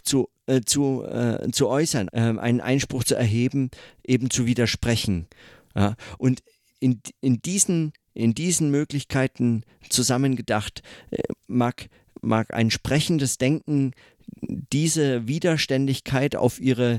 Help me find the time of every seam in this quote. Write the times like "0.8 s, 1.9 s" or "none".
2.1 s